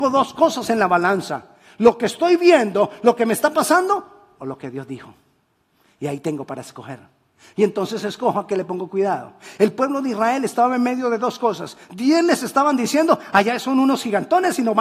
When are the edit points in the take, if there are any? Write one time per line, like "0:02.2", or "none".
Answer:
none